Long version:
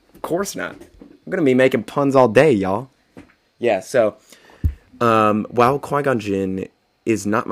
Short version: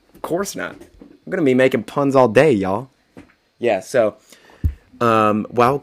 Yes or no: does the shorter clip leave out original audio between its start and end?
no